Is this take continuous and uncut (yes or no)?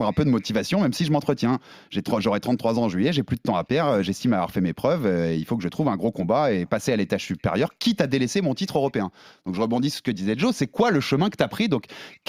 yes